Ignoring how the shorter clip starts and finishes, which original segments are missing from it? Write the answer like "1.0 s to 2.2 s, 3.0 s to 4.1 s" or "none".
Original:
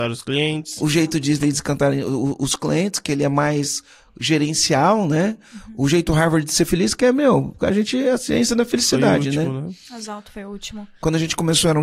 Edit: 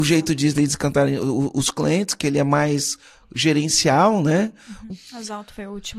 5.8 s to 9.7 s